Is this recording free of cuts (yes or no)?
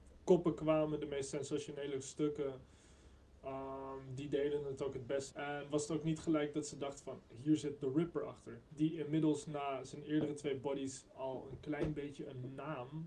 no